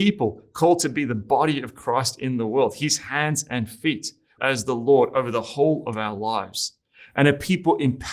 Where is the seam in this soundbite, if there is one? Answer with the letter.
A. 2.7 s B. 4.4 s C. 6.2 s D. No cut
B